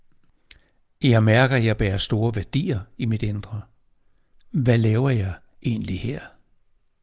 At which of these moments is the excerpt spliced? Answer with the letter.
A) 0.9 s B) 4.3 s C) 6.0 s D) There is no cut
B